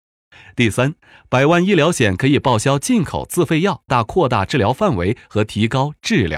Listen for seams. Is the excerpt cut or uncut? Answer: cut